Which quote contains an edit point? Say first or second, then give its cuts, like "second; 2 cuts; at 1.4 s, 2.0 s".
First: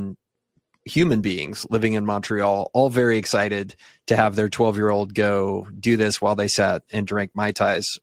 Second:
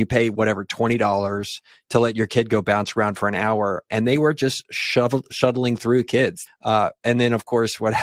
second; 1 cut; at 6.5 s